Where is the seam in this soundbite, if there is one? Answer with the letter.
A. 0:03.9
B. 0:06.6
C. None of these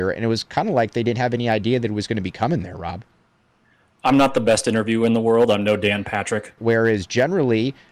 B